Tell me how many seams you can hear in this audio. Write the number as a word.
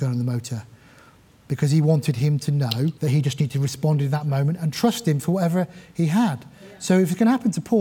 one